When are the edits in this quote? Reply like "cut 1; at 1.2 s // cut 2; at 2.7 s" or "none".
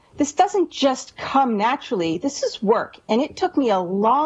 none